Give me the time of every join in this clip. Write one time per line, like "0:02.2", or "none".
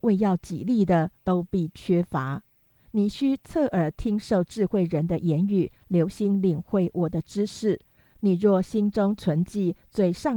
0:01.2